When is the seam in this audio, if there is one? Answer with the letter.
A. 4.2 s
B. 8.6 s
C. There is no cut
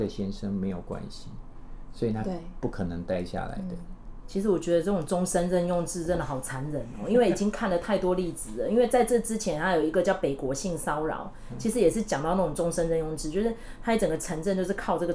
A